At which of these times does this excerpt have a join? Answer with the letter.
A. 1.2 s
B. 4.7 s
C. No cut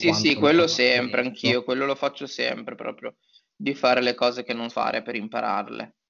B